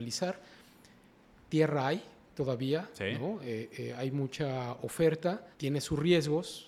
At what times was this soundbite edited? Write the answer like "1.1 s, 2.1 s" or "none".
5.5 s

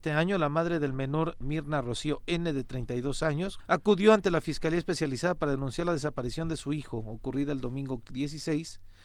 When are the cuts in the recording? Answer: 1.4 s, 3.6 s

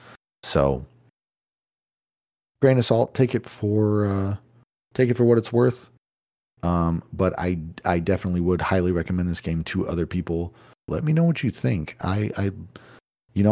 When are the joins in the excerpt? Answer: 10.9 s

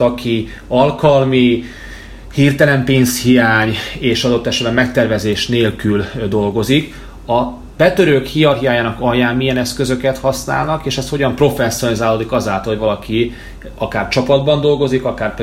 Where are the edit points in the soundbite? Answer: none

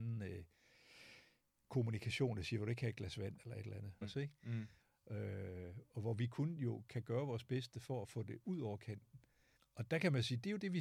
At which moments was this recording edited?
4.0 s, 6.9 s, 9.6 s

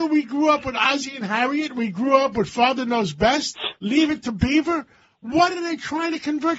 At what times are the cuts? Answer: none

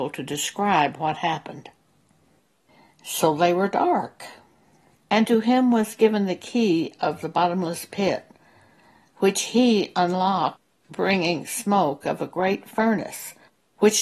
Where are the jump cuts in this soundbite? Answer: 5.0 s

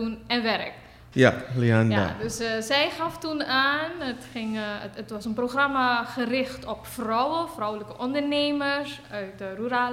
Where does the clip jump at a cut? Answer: 1.1 s

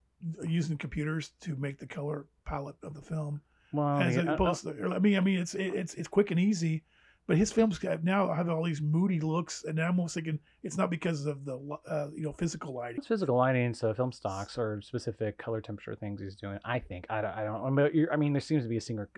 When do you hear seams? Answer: 13.0 s

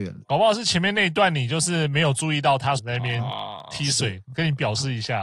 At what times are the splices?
2.8 s

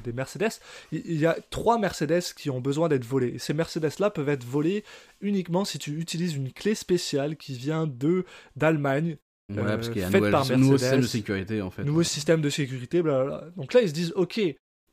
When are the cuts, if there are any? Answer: none

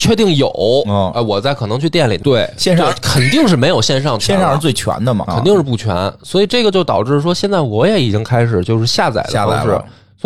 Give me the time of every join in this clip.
2.2 s, 5.2 s

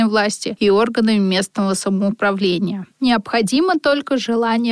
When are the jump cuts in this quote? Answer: 2.9 s

